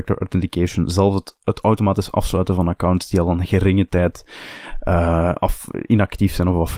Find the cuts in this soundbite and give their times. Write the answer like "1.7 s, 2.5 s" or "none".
none